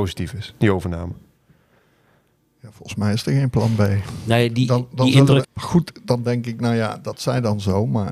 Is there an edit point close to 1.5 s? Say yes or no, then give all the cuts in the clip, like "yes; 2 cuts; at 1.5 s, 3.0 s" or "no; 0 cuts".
no; 1 cut; at 5.4 s